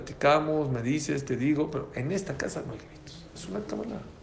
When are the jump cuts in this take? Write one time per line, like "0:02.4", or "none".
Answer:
none

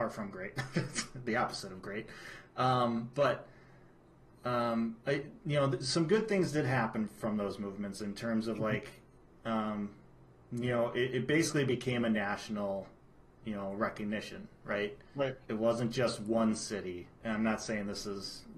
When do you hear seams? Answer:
0:15.4
0:17.2

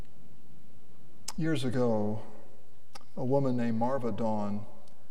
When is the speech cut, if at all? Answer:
0:01.4

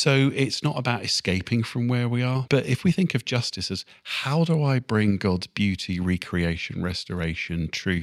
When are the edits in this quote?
0:02.5

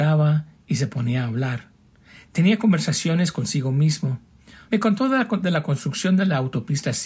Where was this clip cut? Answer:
0:04.7

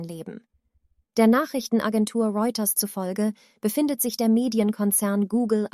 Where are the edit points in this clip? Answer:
none

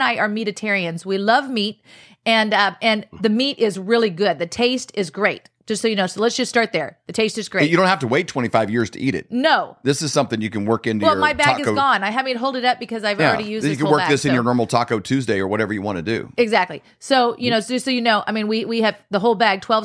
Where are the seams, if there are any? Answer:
none

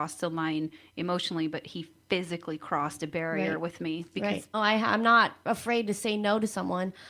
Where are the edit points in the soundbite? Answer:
0:04.5

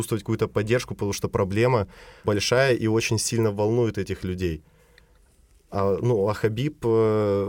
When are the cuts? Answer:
0:02.2

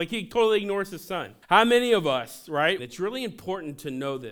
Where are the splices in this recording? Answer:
0:01.4
0:02.8

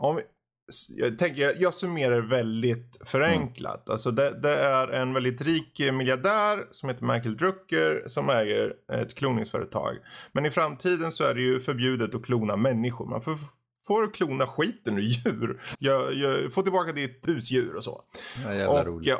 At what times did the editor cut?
0:15.7
0:17.3

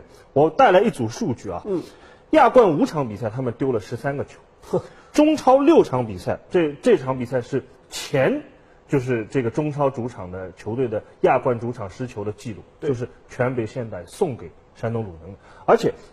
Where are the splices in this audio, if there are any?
0:06.5

